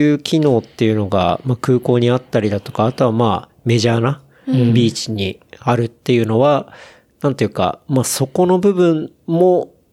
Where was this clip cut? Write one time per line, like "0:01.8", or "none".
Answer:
none